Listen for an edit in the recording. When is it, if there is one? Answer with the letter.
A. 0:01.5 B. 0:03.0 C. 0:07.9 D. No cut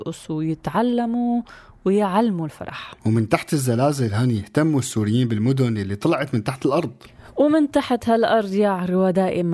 B